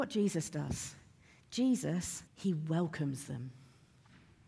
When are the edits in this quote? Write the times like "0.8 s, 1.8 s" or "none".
2.3 s